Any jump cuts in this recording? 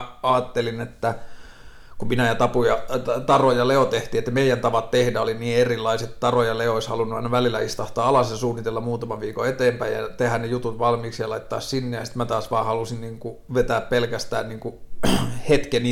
no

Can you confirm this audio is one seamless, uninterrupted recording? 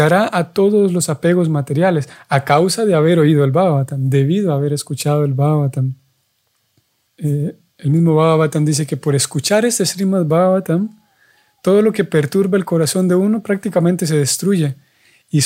no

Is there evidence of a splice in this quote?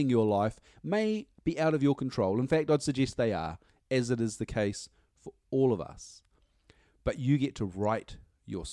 no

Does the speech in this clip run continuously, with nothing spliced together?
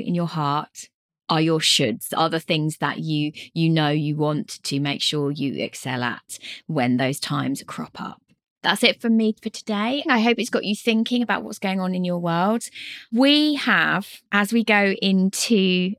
no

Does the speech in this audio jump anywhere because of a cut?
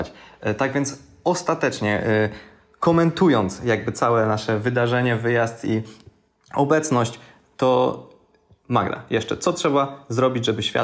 no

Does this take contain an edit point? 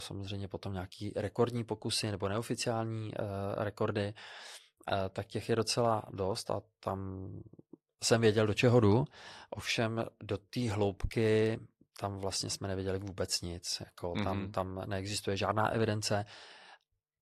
no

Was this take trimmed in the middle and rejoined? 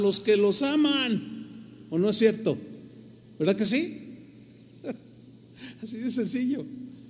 no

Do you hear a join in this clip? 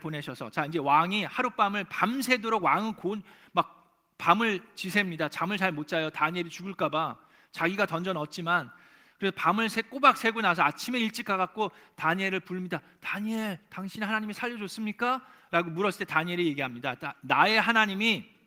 no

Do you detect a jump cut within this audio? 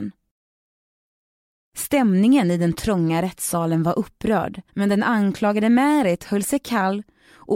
yes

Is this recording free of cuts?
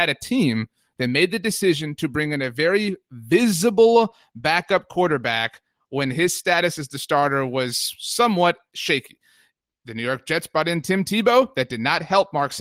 yes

